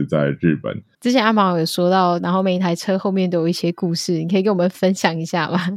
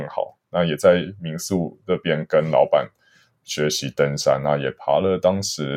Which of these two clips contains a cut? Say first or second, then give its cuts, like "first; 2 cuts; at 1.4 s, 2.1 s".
first; 2 cuts; at 0.9 s, 2.2 s